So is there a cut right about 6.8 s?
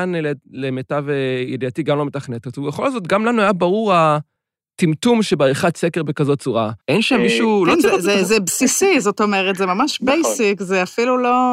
yes; 1 cut; at 6.8 s

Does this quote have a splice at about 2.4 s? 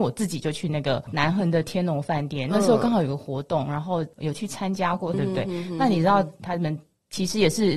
no; 3 cuts; at 4.1 s, 5.1 s, 6.4 s

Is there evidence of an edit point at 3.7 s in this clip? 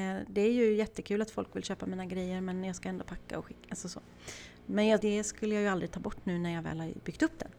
no; 1 cut; at 5.0 s

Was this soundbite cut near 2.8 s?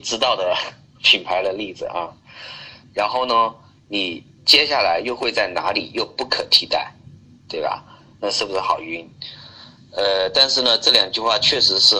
yes; 1 cut; at 2.8 s

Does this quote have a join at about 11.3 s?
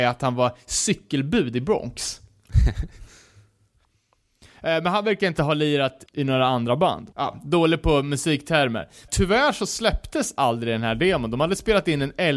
no; 3 cuts; at 6.1 s, 7.1 s, 9.1 s

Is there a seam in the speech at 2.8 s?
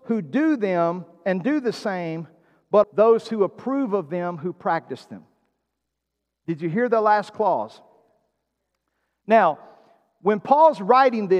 yes; 1 cut; at 2.8 s

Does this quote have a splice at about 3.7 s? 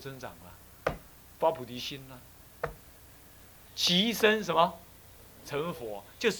yes; 1 cut; at 3.7 s

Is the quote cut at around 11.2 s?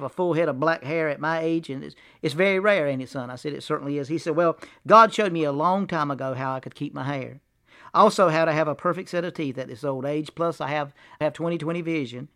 yes; 1 cut; at 11.2 s

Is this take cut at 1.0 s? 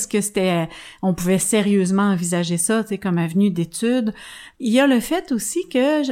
no; 1 cut; at 4.5 s

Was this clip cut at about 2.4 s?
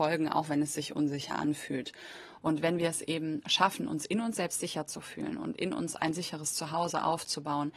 yes; 1 cut; at 2.4 s

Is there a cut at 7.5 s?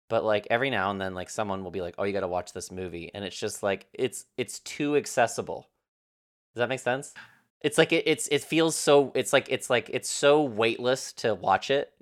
yes; 1 cut; at 7.5 s

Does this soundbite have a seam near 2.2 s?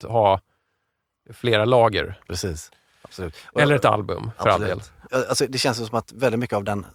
yes; 1 cut; at 2.2 s

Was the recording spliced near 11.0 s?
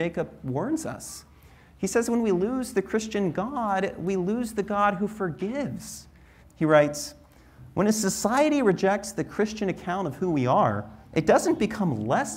yes; 2 cuts; at 6.4 s, 11.0 s

